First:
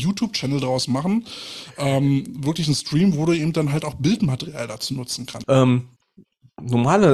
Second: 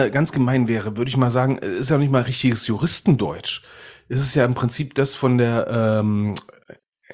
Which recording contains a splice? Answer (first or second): first